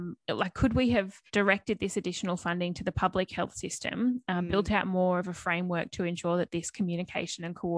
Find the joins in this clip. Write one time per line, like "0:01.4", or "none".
0:01.3

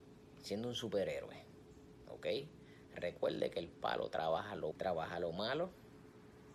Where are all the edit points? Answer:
0:04.7

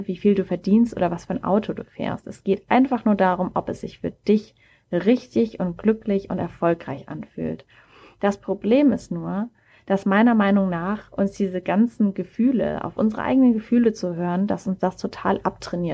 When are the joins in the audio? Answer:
none

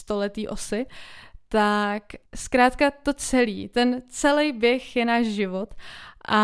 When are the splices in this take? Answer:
0:02.3

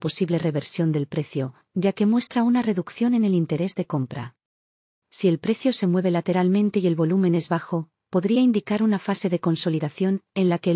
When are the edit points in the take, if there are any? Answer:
0:05.0

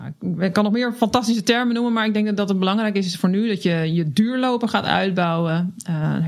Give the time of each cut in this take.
none

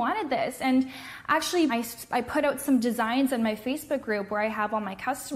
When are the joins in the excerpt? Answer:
0:01.7

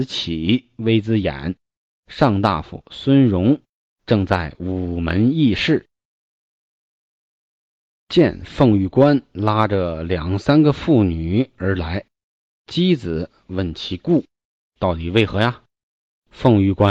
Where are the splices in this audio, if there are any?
none

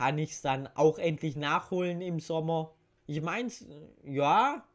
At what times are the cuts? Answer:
0:03.0

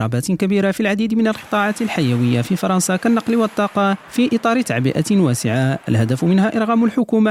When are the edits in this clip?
0:04.0

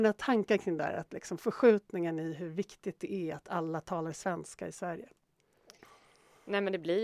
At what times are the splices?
none

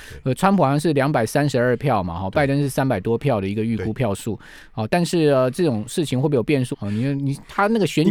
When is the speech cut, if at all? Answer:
0:06.7

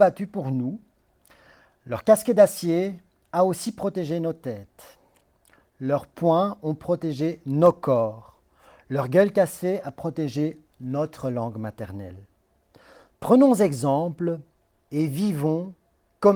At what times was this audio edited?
none

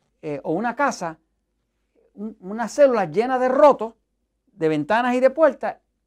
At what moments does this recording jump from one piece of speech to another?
none

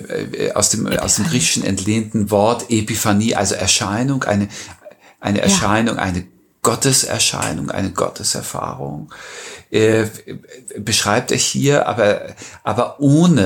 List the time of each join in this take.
none

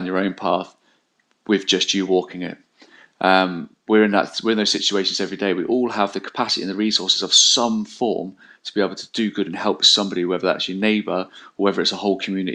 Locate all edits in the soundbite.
none

